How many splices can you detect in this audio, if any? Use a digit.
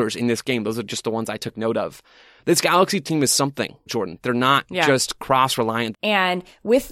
2